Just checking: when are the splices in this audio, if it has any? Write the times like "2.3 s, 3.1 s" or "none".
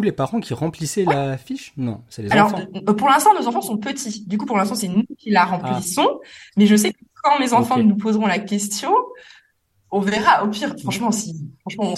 none

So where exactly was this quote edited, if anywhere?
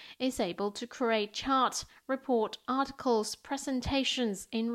none

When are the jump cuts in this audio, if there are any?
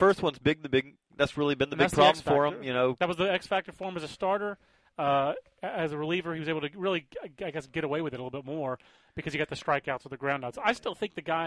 none

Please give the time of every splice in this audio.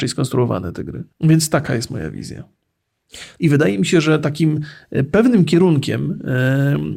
1.1 s, 3.4 s

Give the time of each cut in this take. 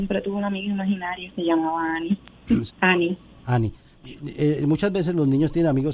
2.7 s

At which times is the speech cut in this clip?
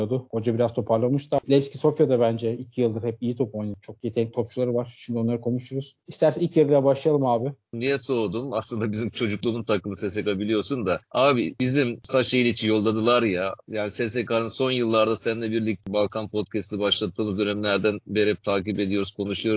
7.7 s

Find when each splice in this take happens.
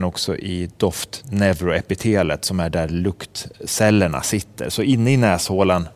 none

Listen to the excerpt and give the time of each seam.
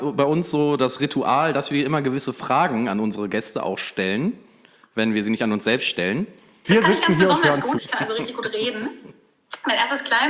6.6 s, 7.8 s

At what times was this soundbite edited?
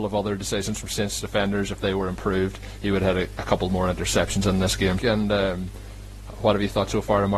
5.0 s

